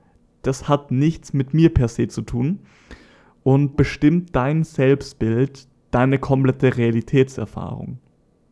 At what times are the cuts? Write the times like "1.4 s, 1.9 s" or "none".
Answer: 3.7 s